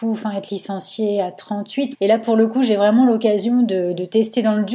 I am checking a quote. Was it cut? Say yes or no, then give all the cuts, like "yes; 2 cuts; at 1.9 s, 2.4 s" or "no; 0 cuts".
yes; 1 cut; at 1.9 s